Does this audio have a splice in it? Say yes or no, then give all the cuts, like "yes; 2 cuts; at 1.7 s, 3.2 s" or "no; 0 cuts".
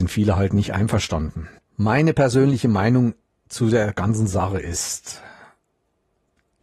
yes; 1 cut; at 1.6 s